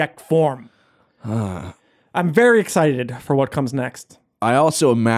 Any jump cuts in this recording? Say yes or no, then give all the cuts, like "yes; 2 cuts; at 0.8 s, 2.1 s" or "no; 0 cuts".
no; 0 cuts